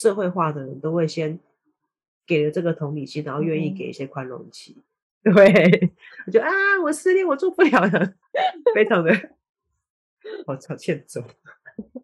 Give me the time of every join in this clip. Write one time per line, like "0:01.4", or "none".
0:05.0
0:08.2